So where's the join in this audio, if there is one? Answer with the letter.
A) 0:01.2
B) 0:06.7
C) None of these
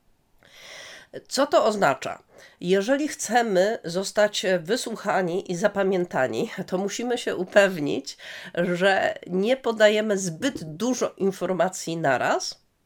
C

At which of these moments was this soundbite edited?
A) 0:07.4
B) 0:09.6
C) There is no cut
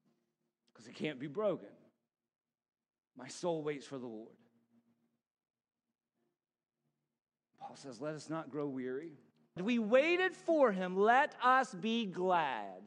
B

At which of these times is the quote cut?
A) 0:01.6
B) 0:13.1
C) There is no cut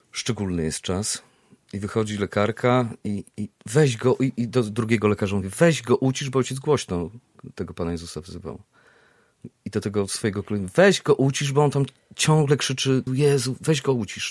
B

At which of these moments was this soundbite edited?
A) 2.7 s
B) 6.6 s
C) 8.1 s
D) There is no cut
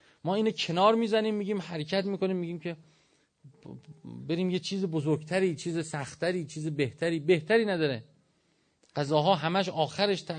D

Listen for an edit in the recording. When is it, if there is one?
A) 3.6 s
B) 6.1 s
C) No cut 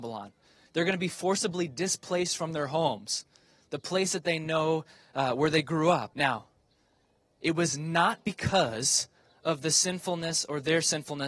B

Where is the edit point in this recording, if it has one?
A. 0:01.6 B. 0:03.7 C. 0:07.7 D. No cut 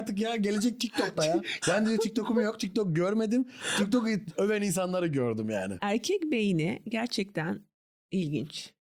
A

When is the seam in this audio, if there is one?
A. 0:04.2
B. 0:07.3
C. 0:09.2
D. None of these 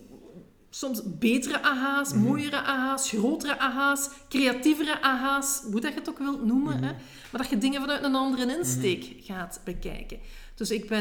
D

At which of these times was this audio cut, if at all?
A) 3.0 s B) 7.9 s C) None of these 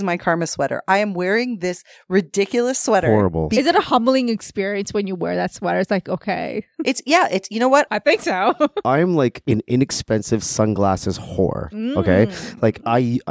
B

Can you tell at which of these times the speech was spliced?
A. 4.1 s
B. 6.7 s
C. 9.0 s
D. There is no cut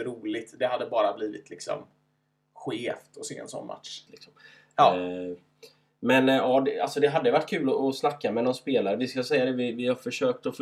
A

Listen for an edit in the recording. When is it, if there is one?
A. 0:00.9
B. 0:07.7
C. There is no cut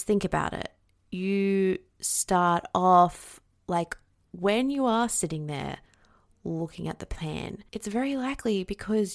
B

